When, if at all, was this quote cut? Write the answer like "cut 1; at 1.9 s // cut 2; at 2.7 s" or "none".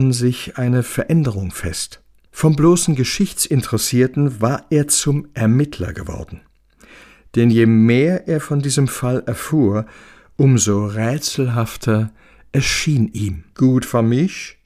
cut 1; at 13.1 s

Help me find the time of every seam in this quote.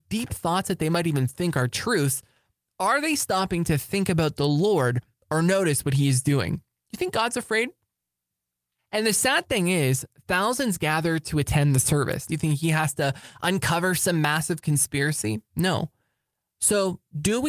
cut 1; at 8.8 s // cut 2; at 12.3 s

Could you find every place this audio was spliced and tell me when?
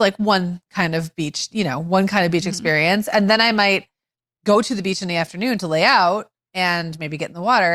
none

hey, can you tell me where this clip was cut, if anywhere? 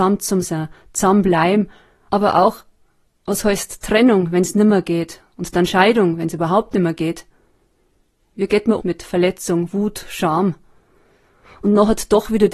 cut 1; at 8.8 s

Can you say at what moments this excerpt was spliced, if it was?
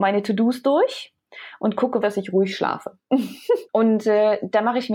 cut 1; at 2.0 s // cut 2; at 3.6 s

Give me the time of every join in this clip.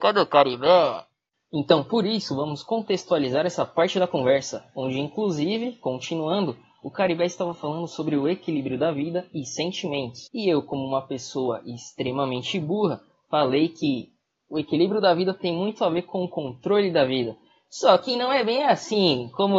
cut 1; at 10.3 s

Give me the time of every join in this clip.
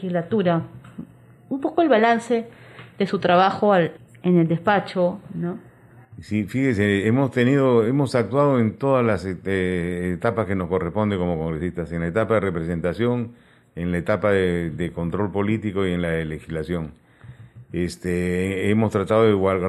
none

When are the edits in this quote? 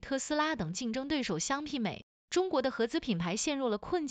cut 1; at 2.1 s

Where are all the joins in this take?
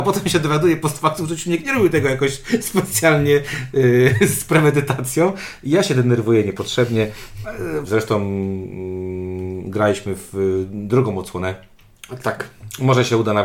cut 1; at 7.8 s

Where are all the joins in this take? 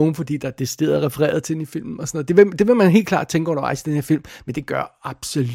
none

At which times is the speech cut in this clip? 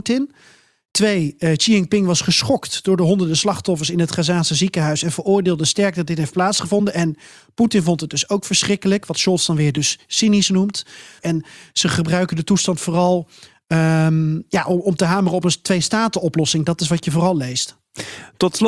cut 1; at 11.2 s

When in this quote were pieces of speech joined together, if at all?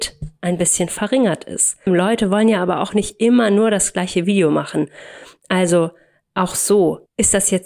cut 1; at 1.9 s

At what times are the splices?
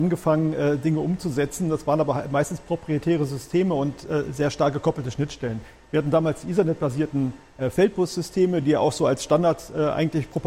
none

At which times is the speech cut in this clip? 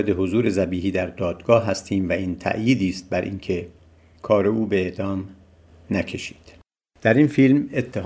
none

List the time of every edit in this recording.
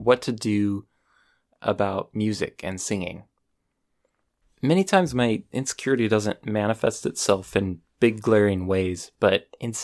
cut 1; at 4.4 s

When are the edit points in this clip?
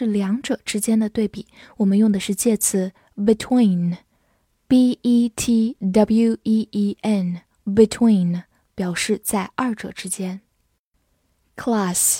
none

